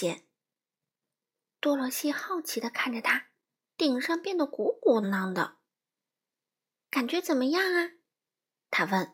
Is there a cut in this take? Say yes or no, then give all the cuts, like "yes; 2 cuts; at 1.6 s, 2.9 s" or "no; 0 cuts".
yes; 2 cuts; at 3.6 s, 5.0 s